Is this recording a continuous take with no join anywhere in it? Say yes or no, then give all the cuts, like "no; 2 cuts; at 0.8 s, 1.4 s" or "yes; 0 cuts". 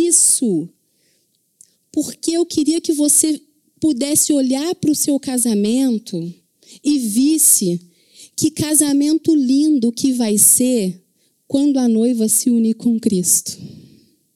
yes; 0 cuts